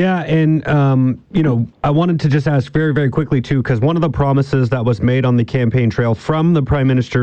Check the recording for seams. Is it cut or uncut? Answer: cut